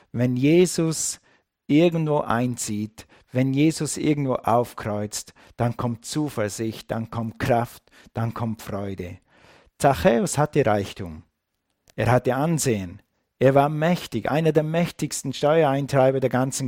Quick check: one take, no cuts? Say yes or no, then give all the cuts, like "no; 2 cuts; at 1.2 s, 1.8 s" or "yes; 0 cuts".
yes; 0 cuts